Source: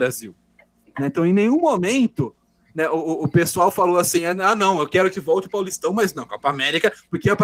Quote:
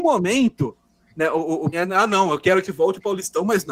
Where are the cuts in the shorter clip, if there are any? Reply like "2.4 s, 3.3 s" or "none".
1.7 s